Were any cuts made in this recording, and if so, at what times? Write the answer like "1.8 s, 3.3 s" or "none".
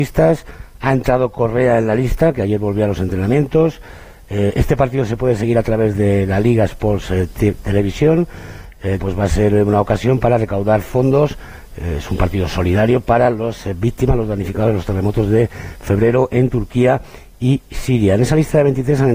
9.0 s